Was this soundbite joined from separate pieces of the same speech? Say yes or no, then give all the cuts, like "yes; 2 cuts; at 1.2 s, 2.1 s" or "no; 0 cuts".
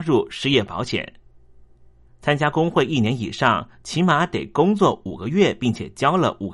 yes; 1 cut; at 2.1 s